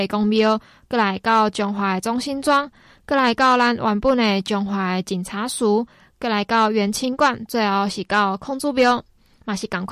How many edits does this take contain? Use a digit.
0